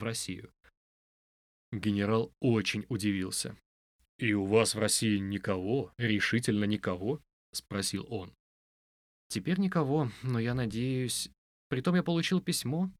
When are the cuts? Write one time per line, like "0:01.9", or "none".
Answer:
none